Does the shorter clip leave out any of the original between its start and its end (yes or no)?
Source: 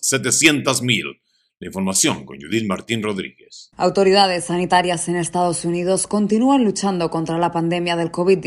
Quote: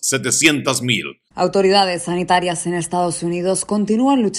yes